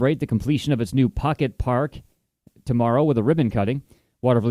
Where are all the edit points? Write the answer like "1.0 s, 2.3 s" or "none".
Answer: none